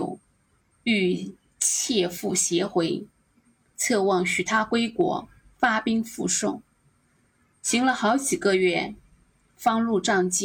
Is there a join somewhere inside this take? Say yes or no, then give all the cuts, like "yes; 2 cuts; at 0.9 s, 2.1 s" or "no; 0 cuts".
no; 0 cuts